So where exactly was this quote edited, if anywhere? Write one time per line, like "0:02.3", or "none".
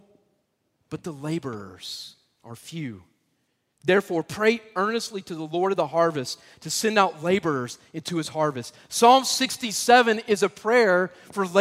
none